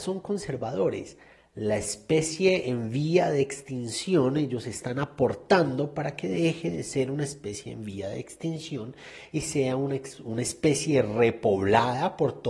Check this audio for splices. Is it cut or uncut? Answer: uncut